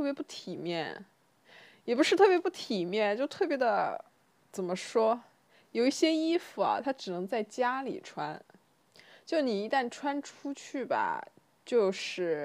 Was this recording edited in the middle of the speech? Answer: no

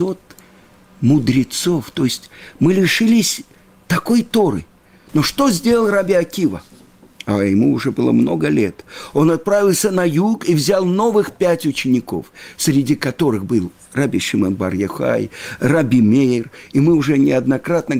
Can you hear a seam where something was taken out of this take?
no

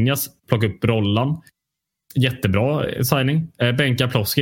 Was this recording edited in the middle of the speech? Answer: no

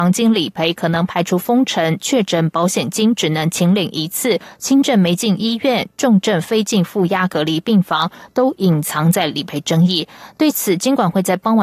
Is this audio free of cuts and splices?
yes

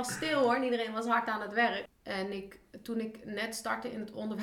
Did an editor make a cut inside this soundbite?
yes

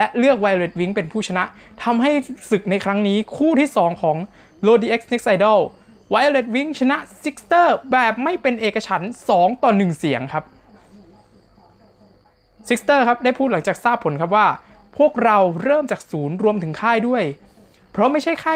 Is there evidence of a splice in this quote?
no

